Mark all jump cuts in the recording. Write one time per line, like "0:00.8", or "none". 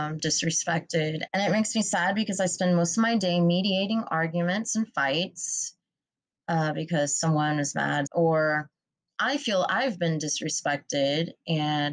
0:01.3
0:08.1